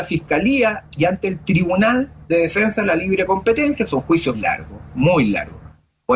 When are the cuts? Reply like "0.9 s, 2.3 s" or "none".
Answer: 4.3 s